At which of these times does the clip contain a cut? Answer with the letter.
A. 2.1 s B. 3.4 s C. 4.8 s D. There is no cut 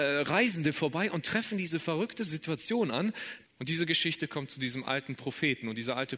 B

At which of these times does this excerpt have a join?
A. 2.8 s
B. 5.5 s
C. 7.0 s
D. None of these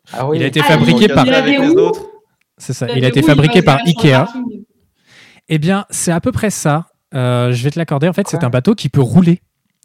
D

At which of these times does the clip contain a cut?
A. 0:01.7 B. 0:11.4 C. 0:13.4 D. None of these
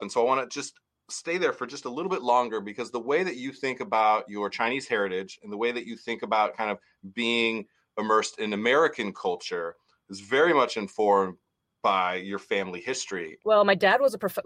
C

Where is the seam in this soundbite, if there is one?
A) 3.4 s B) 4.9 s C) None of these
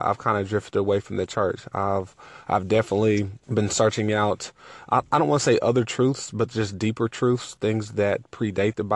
A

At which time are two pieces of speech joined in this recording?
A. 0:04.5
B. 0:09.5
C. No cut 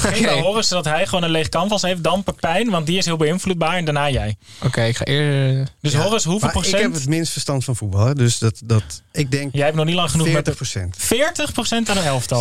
C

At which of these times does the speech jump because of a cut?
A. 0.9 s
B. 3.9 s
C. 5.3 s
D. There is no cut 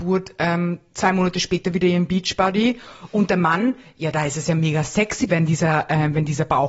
C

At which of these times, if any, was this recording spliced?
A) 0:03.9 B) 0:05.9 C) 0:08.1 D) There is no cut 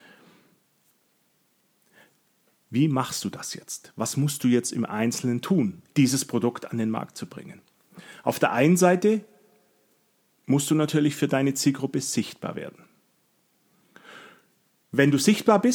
B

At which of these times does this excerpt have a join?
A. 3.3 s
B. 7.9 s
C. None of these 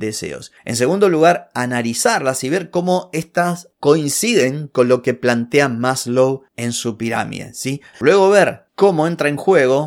B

